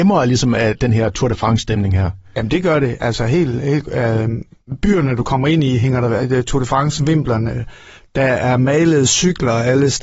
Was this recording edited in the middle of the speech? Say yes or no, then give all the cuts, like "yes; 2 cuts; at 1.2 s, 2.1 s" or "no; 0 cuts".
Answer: no; 0 cuts